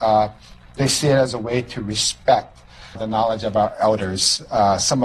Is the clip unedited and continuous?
no; 1 cut; at 3.0 s

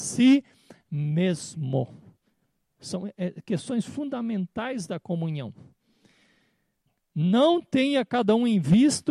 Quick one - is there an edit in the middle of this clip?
no; 0 cuts

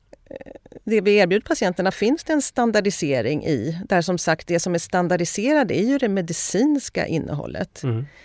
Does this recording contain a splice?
no; 0 cuts

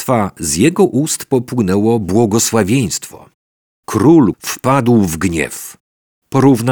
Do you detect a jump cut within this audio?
yes; 1 cut; at 4.3 s

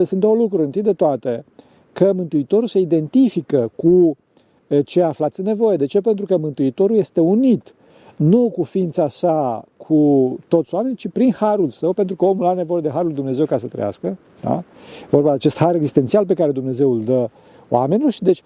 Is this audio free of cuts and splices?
yes; 0 cuts

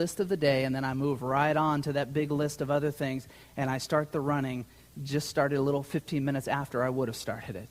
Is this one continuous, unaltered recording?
yes; 0 cuts

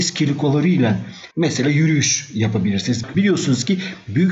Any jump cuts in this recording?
yes; 2 cuts; at 1.3 s, 3.1 s

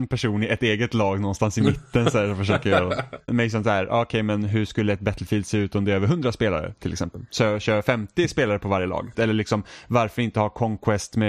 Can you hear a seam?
yes; 2 cuts; at 3.3 s, 9.1 s

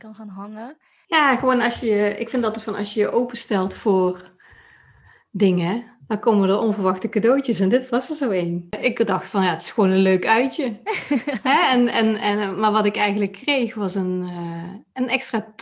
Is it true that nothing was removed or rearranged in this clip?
yes; 0 cuts

